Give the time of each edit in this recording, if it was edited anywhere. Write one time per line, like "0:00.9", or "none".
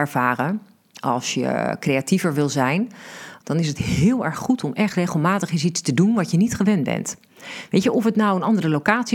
0:03.4